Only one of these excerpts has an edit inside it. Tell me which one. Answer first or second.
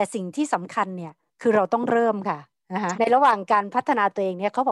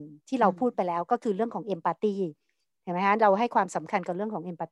first